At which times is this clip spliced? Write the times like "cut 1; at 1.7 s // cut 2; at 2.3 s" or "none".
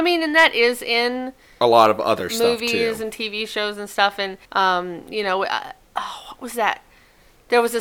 cut 1; at 4.5 s